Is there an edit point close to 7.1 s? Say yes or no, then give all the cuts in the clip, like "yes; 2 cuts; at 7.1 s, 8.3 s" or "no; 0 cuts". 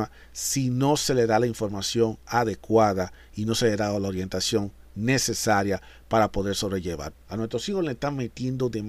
yes; 1 cut; at 7.1 s